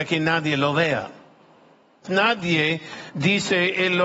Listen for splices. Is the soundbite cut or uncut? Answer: cut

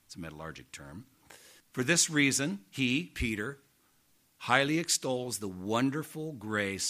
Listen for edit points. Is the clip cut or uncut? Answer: cut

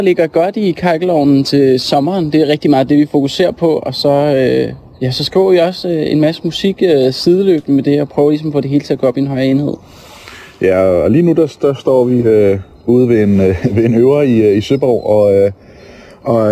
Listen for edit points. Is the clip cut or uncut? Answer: uncut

